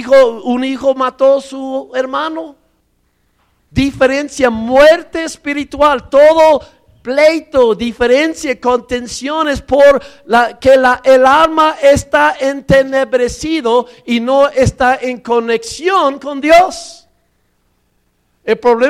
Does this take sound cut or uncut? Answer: uncut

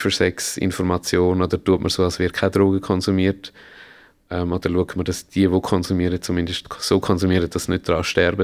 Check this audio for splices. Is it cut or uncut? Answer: uncut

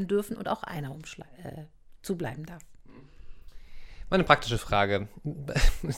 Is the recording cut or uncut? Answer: uncut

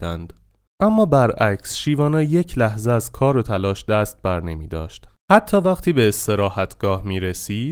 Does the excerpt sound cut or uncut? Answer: uncut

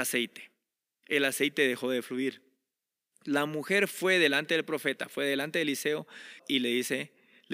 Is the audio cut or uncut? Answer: cut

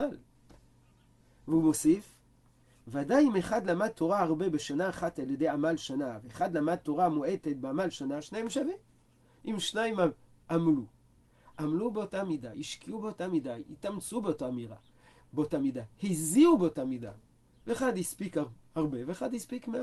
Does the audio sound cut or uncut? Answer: uncut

